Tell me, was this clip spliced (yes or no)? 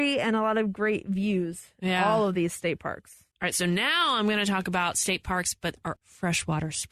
yes